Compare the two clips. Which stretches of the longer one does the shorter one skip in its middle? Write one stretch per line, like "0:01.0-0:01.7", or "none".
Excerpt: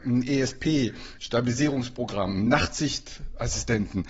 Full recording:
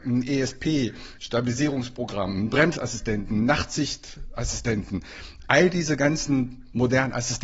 0:02.5-0:03.4